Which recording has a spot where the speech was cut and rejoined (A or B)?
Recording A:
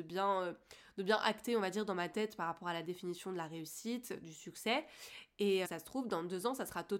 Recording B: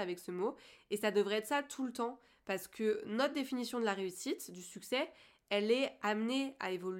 A